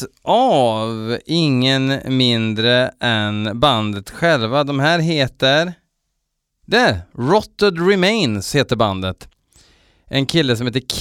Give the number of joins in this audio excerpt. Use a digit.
1